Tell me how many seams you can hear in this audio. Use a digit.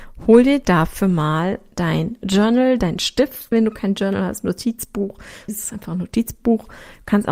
2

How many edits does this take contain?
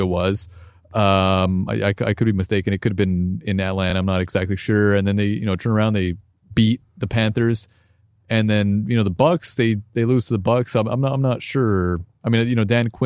0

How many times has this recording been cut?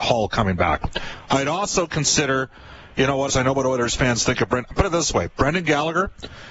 1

